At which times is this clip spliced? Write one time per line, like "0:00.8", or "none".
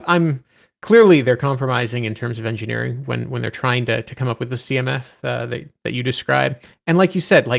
none